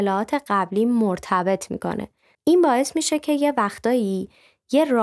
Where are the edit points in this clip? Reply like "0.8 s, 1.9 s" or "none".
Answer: 2.3 s